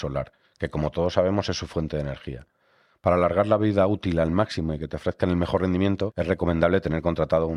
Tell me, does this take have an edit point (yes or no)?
yes